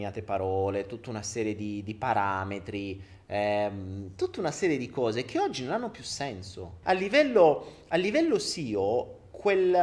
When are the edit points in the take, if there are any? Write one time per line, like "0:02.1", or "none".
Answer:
0:06.8